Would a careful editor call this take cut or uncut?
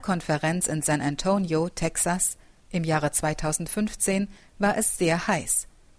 uncut